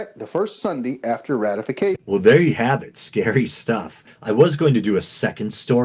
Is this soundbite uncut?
yes; 0 cuts

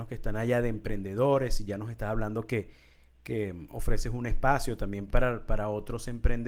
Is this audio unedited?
yes; 0 cuts

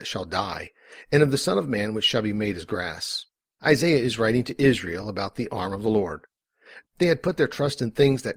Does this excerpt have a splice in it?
yes; 2 cuts; at 3.6 s, 6.8 s

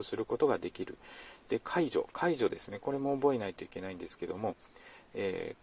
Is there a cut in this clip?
no; 0 cuts

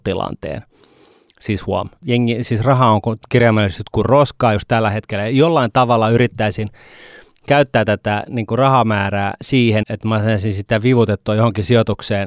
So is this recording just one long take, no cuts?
no; 2 cuts; at 2.0 s, 9.8 s

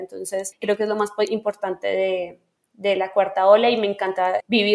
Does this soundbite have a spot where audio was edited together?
no; 0 cuts

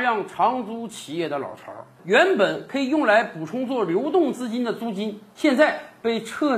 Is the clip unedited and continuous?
yes; 0 cuts

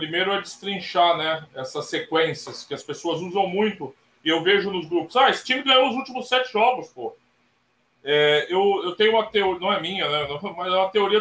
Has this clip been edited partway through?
no; 0 cuts

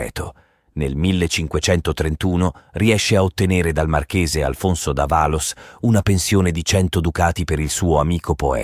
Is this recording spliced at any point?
no; 0 cuts

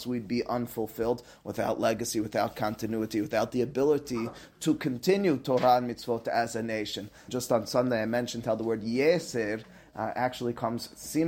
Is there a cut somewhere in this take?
yes; 1 cut; at 7.3 s

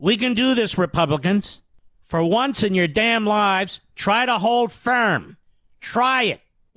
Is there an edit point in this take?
no; 0 cuts

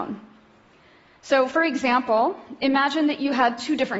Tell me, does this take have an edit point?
no; 0 cuts

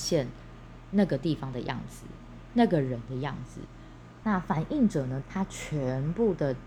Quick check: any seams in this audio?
yes; 2 cuts; at 4.2 s, 5.2 s

